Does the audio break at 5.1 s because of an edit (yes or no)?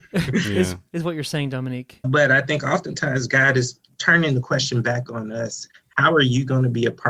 no